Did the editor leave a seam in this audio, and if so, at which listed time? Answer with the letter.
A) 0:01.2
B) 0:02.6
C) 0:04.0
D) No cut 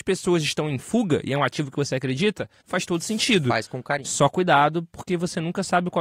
B